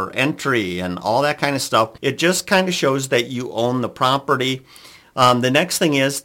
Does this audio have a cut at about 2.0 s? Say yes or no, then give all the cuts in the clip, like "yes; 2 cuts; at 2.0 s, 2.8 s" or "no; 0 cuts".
yes; 1 cut; at 2.0 s